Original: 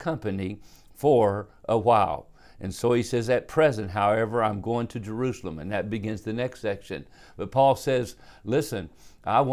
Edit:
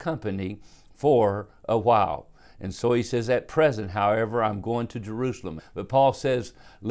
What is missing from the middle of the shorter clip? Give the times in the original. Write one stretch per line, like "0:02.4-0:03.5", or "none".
0:05.6-0:07.2